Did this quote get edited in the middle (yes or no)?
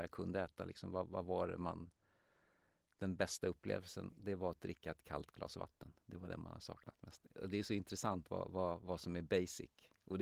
no